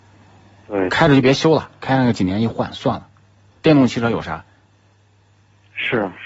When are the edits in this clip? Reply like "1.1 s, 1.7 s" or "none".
3.6 s